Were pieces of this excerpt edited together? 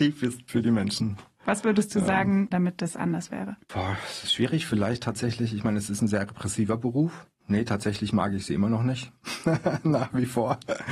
yes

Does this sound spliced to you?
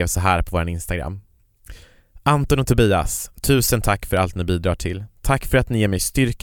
no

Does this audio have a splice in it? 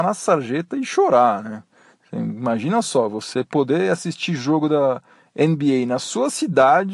no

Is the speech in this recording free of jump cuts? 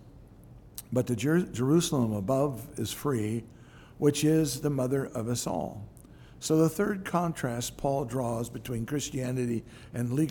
yes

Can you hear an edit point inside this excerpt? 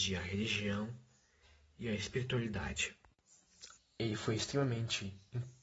yes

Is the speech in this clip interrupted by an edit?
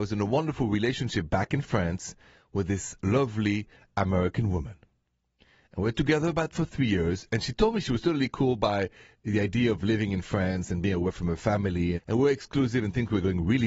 yes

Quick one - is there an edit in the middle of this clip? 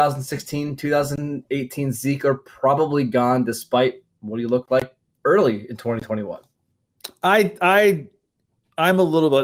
no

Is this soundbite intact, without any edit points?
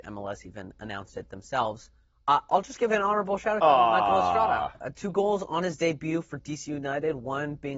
yes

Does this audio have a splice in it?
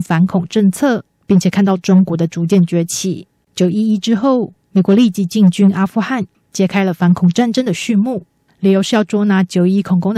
yes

